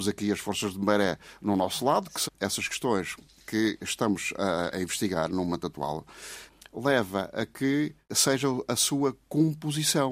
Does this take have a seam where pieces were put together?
yes; 2 cuts; at 2.2 s, 4.7 s

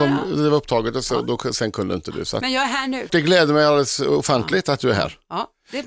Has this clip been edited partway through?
yes; 1 cut; at 3.1 s

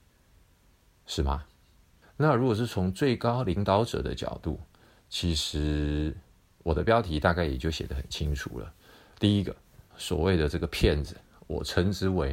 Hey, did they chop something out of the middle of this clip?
yes; 2 cuts; at 2.0 s, 9.9 s

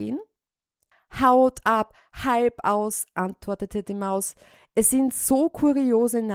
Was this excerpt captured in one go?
yes; 0 cuts

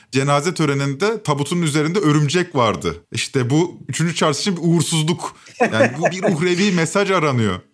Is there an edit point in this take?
yes; 1 cut; at 3.0 s

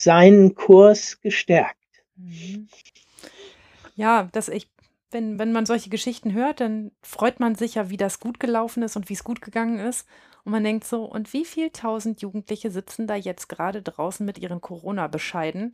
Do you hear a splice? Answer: no; 0 cuts

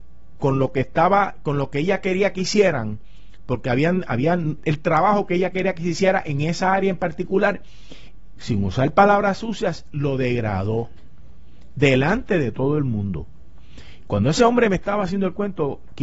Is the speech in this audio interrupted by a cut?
yes; 2 cuts; at 4.6 s, 8.4 s

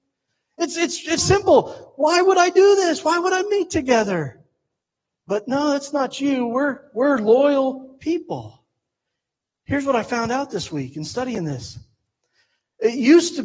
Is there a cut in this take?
yes; 1 cut; at 1.2 s

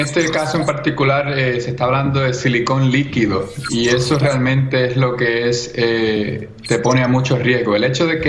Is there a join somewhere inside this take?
no; 0 cuts

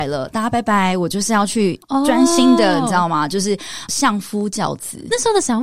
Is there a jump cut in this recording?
no; 0 cuts

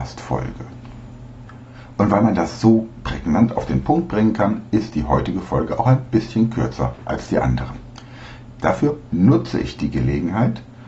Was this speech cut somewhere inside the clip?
no; 0 cuts

